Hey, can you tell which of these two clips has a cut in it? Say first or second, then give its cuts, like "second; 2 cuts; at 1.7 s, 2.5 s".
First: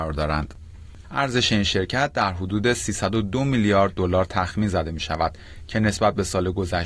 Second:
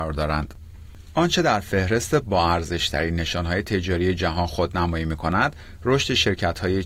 first; 1 cut; at 1.0 s